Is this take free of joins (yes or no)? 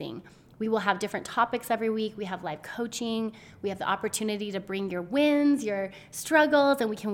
yes